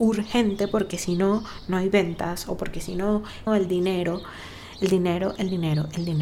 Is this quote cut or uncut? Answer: cut